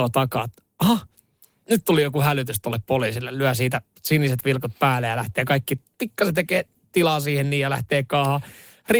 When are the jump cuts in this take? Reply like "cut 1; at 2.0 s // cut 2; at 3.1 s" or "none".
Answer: cut 1; at 1.6 s